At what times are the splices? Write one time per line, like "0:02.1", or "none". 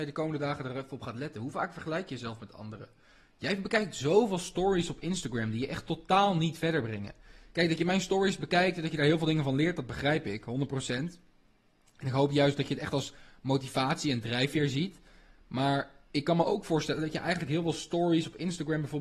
none